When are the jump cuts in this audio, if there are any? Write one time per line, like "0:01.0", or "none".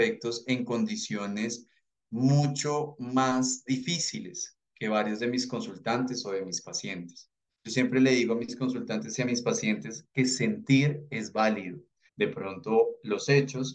0:07.5
0:12.1